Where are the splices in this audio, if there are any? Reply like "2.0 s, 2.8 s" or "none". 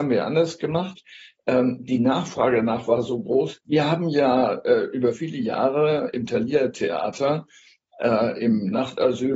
3.6 s